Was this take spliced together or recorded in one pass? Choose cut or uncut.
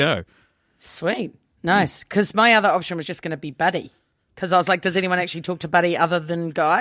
uncut